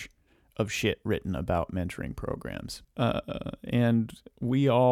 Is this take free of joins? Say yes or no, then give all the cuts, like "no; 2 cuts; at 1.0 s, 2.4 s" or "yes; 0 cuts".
no; 1 cut; at 2.8 s